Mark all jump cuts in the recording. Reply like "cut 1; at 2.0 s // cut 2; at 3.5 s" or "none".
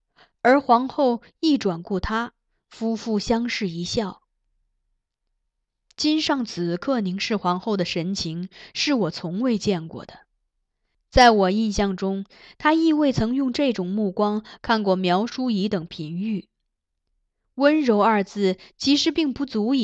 none